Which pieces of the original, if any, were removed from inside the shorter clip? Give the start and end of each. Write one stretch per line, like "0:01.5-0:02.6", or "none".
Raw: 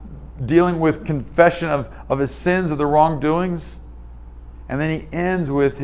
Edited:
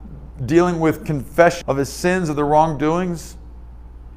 0:01.6-0:02.0